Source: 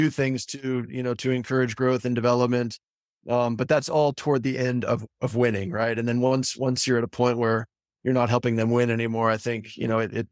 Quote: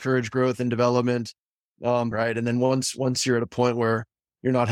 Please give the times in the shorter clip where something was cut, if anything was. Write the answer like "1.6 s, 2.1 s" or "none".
2.1 s